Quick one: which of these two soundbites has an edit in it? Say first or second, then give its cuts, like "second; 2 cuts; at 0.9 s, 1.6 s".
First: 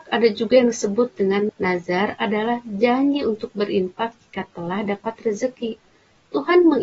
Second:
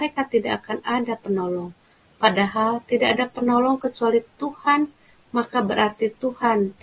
first; 1 cut; at 1.5 s